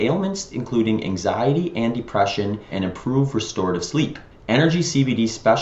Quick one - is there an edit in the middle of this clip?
yes; 1 cut; at 2.7 s

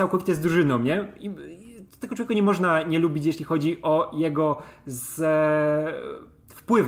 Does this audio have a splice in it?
no; 0 cuts

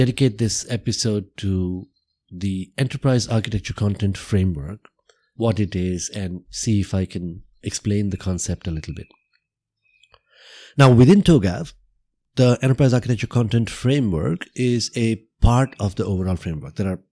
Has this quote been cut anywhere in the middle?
no; 0 cuts

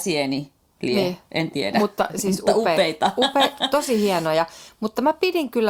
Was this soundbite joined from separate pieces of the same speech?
no; 0 cuts

